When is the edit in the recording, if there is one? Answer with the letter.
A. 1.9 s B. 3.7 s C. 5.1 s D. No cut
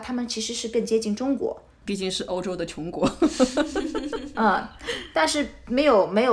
A